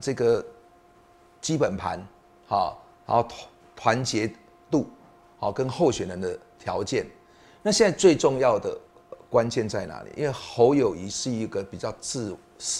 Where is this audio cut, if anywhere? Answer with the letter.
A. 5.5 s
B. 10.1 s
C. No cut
C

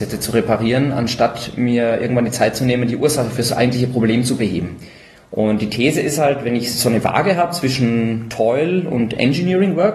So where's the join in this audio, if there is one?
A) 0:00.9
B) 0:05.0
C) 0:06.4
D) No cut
D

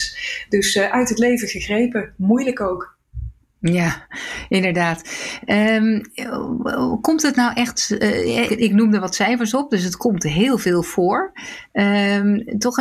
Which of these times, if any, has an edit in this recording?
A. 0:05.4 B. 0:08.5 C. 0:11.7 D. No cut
B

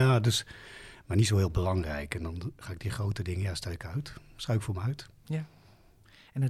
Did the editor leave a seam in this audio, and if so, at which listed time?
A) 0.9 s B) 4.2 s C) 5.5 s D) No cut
A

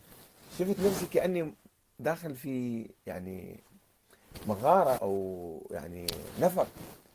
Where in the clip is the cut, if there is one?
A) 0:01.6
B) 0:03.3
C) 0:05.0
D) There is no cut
C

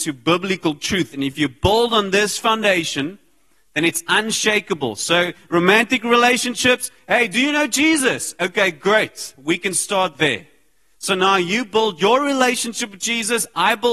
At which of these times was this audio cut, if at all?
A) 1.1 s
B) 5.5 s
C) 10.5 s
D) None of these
D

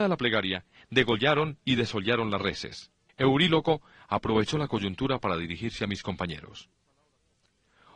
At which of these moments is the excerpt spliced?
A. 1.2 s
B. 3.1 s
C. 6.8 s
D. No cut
B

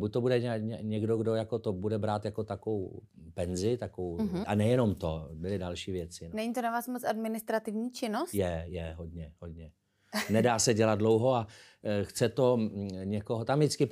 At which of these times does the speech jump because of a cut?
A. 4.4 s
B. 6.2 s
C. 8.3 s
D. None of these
A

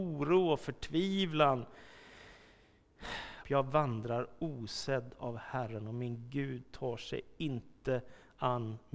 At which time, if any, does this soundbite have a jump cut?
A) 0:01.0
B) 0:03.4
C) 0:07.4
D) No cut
B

